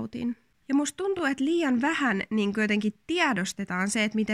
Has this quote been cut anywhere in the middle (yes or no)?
no